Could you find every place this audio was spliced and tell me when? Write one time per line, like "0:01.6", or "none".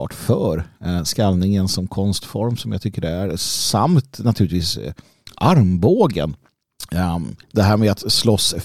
0:07.4